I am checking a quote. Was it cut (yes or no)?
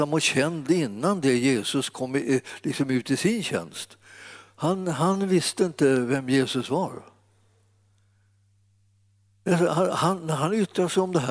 no